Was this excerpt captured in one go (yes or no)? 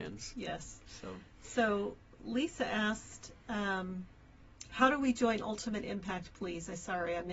yes